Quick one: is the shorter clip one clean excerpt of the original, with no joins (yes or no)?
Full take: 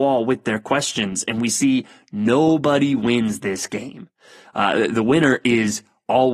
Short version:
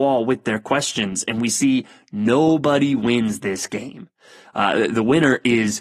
yes